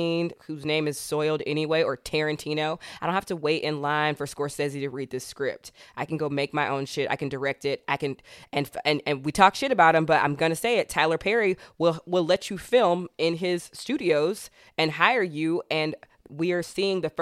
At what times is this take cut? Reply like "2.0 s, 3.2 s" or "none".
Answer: none